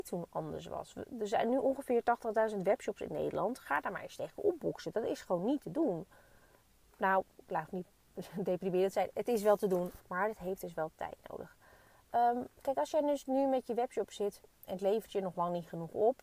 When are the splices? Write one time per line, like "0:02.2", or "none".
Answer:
0:10.0
0:12.5